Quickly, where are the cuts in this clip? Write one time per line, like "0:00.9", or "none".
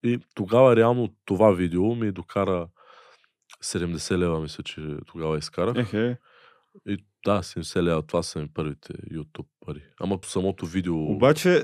0:10.2